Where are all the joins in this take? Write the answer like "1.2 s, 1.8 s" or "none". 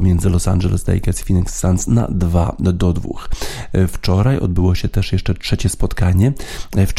none